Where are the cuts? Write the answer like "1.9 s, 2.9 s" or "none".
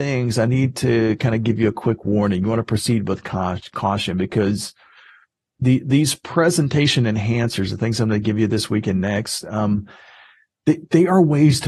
none